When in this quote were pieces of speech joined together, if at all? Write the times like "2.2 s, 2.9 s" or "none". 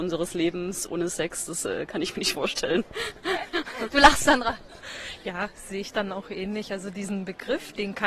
2.3 s